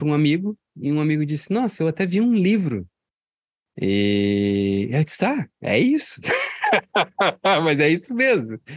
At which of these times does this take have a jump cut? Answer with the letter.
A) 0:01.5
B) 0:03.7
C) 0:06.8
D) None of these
B